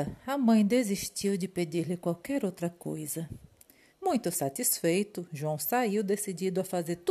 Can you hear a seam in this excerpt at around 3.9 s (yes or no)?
yes